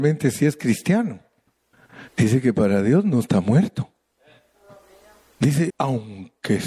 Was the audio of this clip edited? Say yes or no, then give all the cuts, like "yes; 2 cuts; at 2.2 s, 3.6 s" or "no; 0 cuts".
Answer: yes; 2 cuts; at 2.1 s, 5.7 s